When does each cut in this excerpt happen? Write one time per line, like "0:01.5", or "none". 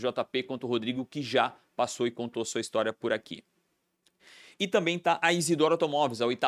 none